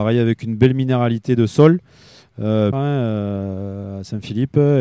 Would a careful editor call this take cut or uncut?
cut